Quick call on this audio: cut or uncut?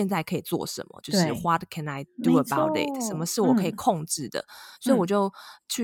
uncut